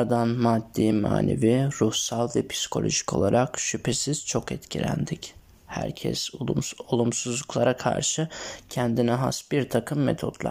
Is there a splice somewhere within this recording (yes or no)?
no